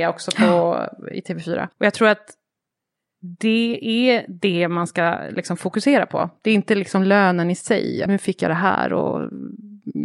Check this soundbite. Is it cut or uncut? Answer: cut